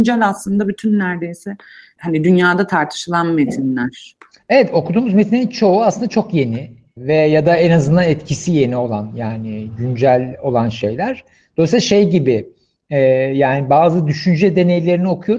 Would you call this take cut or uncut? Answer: cut